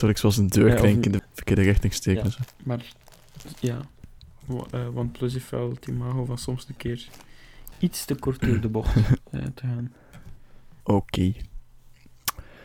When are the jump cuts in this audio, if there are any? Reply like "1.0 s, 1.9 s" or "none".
1.2 s, 2.5 s, 10.8 s